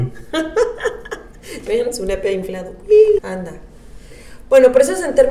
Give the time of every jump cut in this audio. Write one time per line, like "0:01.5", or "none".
0:03.2